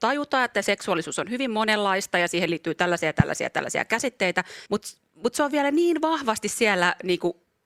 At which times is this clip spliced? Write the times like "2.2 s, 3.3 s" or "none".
4.7 s